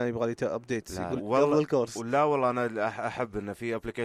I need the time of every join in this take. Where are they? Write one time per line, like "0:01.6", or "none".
0:01.2